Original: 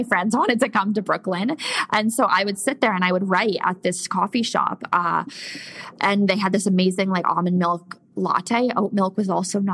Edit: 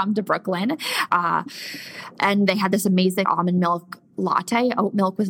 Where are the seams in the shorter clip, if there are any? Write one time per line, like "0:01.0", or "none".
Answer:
0:01.1
0:03.2